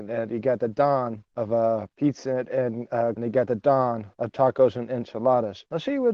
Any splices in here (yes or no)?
yes